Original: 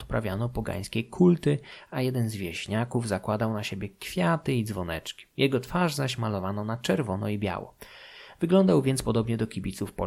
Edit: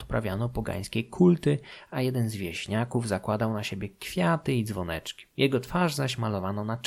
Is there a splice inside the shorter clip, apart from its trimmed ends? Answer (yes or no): no